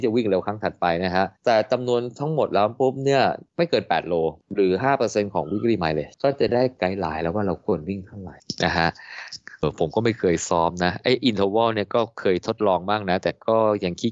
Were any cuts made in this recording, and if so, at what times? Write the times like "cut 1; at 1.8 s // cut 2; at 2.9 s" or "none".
cut 1; at 9.6 s